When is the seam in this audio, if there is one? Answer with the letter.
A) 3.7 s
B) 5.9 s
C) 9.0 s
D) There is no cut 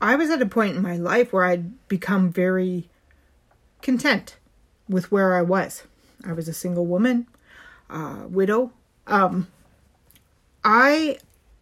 C